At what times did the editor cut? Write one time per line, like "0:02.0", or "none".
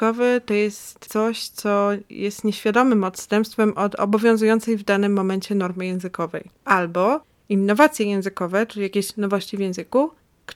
none